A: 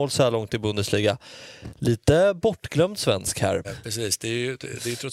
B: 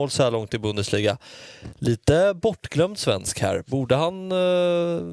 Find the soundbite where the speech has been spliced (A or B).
A